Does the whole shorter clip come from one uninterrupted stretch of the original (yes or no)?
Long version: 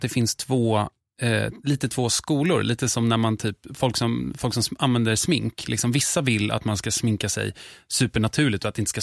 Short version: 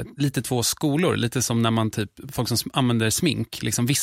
no